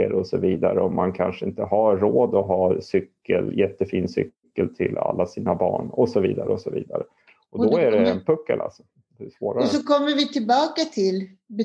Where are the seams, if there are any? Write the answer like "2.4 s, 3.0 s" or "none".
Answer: none